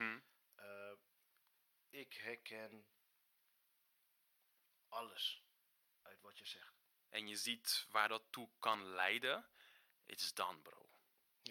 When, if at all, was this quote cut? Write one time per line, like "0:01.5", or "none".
0:07.0